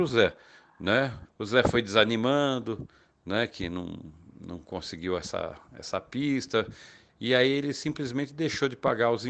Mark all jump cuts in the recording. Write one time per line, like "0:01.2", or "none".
0:01.3